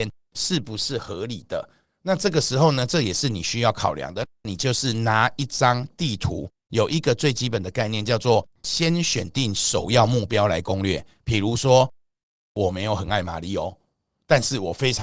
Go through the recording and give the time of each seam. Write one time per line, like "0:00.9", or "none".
0:04.2